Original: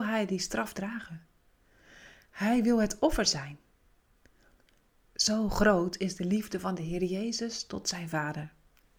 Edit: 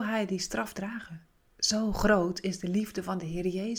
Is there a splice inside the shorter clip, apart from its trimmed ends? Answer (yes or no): yes